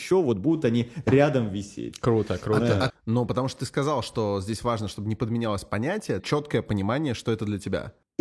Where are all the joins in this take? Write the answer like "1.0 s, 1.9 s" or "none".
2.9 s, 6.2 s

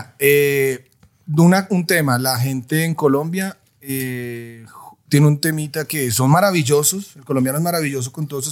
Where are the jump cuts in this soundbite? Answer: none

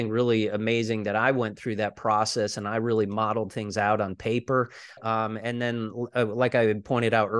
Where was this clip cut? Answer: 5.0 s

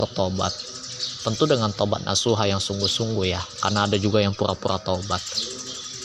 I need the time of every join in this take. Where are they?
none

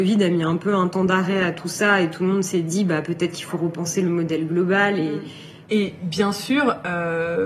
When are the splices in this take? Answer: 5.6 s

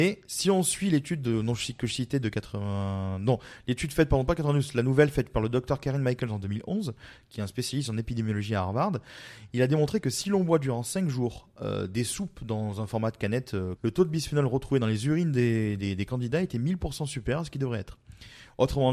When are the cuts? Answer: 13.8 s

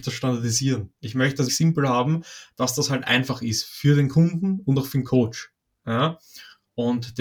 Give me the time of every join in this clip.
1.5 s

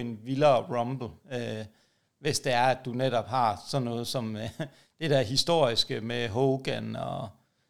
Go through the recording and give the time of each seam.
none

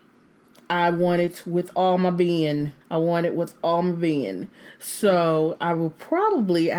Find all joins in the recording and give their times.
2.8 s

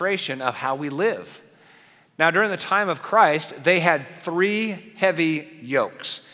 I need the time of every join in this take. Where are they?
none

